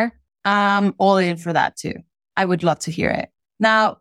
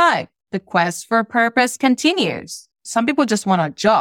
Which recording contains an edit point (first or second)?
second